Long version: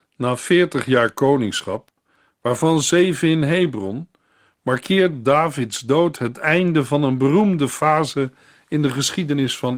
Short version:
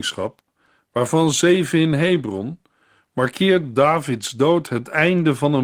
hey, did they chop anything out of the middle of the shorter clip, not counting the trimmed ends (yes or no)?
no